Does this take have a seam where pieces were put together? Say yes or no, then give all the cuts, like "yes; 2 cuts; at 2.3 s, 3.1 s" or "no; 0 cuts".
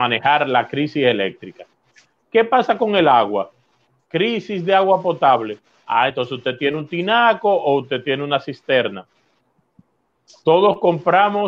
no; 0 cuts